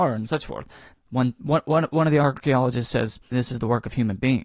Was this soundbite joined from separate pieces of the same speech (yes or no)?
yes